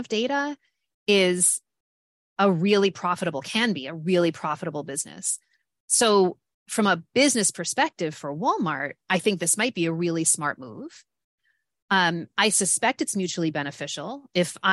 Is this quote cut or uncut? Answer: uncut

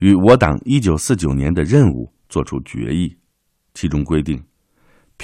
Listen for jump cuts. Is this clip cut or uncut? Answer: uncut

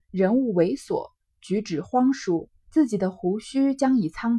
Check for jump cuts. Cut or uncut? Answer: cut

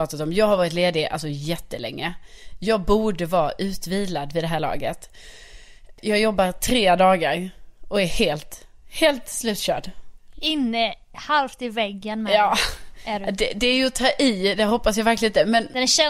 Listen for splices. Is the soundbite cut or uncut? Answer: uncut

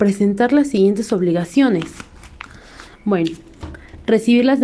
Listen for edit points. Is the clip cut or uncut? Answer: uncut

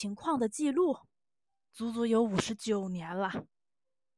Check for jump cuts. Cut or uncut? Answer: uncut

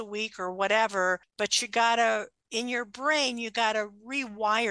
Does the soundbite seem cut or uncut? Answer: uncut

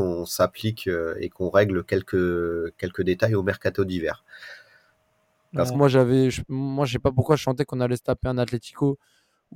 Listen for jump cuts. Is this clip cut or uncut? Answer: cut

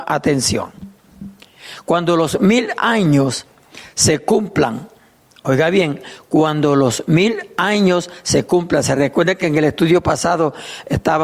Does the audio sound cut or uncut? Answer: uncut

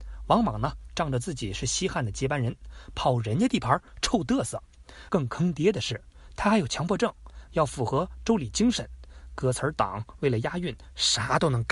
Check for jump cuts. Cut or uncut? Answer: cut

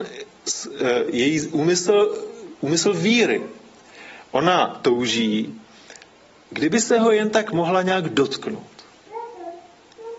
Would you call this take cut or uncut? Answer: uncut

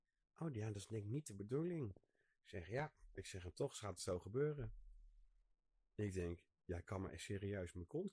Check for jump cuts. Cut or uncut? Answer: uncut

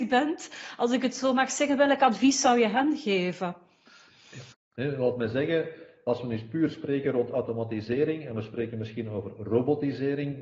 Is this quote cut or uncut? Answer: cut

